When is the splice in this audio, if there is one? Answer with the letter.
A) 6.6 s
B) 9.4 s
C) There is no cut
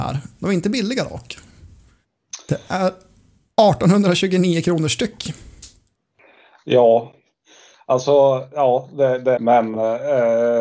B